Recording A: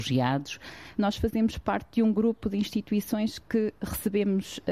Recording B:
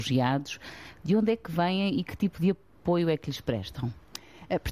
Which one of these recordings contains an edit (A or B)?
A